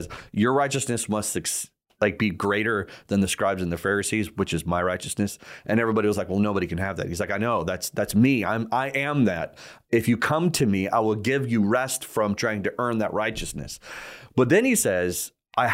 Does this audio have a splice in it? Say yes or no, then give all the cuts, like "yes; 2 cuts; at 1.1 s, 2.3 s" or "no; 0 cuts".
no; 0 cuts